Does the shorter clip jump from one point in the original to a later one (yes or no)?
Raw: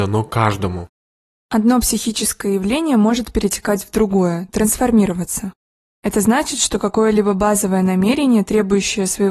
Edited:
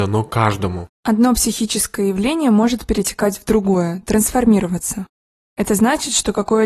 yes